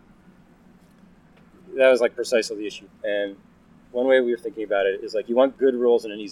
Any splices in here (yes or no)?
yes